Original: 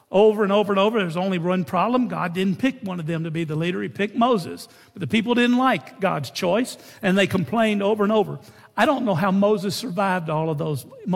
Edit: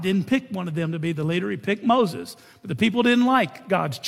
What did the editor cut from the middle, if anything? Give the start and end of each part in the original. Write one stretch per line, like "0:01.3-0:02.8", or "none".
none

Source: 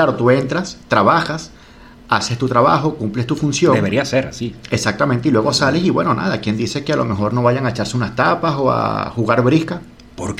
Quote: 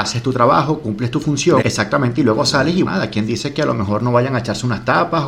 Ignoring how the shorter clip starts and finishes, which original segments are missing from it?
0:03.8-0:04.7
0:05.9-0:06.2

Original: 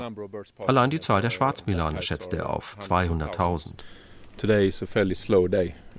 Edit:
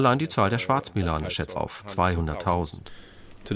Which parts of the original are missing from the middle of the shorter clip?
0:02.3-0:02.5

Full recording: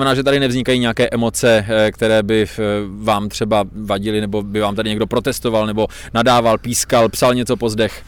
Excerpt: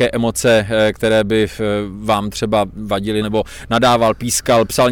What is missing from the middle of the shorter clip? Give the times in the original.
0:04.2-0:05.7

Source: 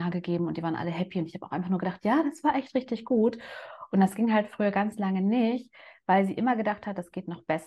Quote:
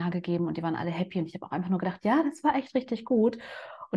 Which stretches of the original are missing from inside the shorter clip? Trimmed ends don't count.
none

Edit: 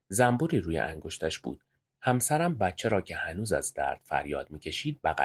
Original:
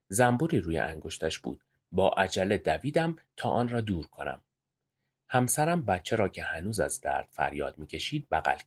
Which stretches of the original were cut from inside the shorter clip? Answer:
0:01.9-0:05.1

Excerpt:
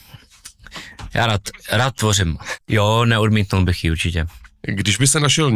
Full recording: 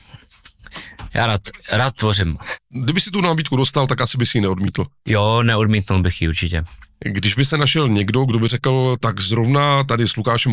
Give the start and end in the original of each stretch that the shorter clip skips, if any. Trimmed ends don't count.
0:02.6-0:05.0

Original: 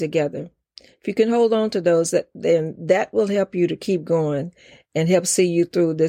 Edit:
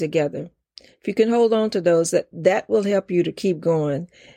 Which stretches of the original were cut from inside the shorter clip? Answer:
0:02.3-0:02.8

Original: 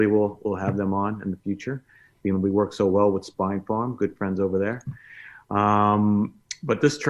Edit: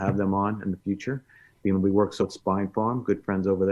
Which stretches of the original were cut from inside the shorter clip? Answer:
0:02.8-0:03.1

